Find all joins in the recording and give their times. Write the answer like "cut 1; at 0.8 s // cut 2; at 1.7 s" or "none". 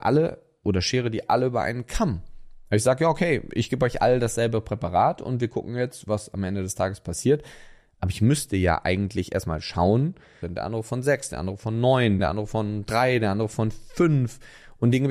cut 1; at 10.4 s // cut 2; at 12.2 s

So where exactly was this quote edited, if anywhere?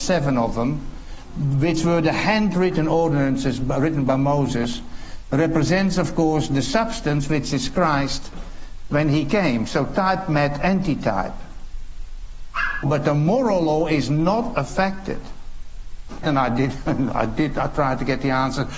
cut 1; at 12.8 s // cut 2; at 16.2 s

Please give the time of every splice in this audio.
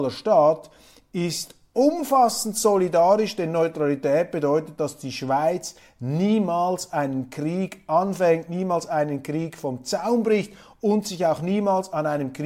none

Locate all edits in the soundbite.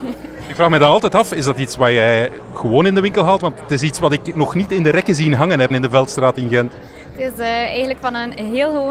cut 1; at 5.7 s

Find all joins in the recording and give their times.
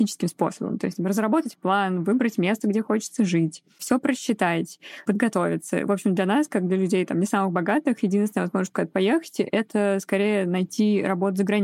none

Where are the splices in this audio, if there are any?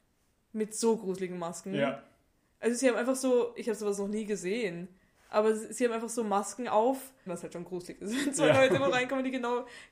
cut 1; at 7.3 s

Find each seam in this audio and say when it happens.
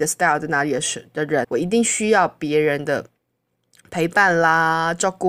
cut 1; at 1.4 s

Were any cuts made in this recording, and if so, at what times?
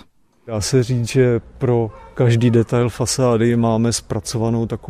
none

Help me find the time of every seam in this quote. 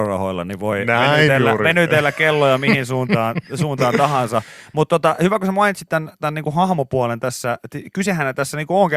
none

